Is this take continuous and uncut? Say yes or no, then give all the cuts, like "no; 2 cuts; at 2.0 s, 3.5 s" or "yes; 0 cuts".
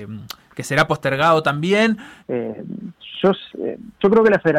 no; 1 cut; at 2.2 s